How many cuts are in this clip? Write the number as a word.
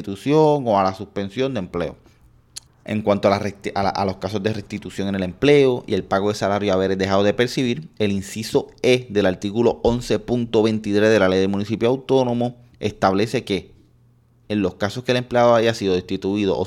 two